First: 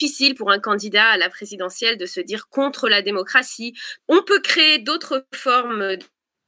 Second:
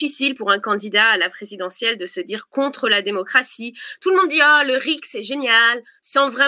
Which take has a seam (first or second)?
first